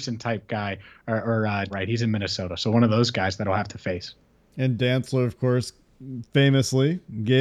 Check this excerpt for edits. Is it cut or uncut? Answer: cut